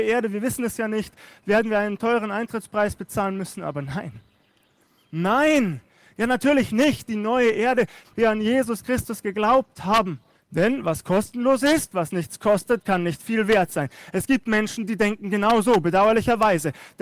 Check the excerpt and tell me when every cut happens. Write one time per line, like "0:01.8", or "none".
0:08.0
0:10.3